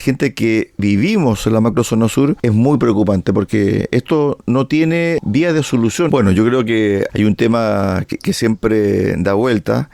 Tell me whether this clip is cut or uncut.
cut